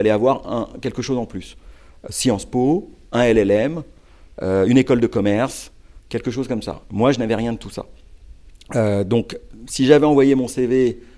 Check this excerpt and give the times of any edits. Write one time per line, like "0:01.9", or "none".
none